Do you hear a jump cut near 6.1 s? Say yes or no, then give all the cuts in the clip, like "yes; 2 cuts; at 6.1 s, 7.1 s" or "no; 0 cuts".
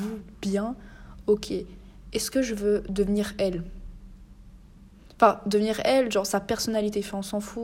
no; 0 cuts